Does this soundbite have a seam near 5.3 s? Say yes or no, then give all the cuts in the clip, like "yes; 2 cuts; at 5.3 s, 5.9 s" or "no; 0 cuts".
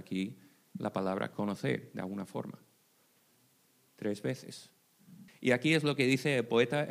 yes; 1 cut; at 5.3 s